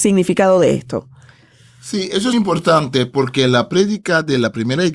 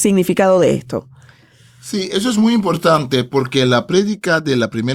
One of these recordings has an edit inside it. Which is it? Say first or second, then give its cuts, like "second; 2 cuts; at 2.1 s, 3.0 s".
first; 1 cut; at 2.3 s